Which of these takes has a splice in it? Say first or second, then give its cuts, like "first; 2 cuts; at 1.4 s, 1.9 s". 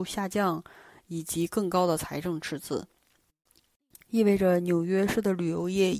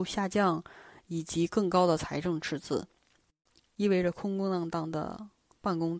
second; 1 cut; at 3.8 s